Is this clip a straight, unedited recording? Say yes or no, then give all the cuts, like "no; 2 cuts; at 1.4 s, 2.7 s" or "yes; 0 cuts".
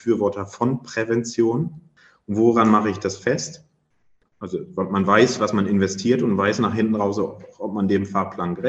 no; 1 cut; at 4.2 s